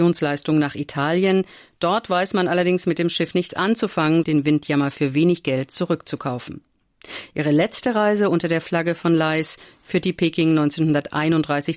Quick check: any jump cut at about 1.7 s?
no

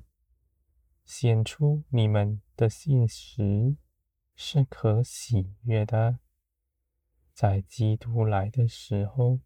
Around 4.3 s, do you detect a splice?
yes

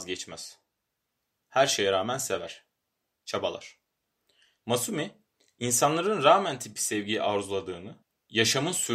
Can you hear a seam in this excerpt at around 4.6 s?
yes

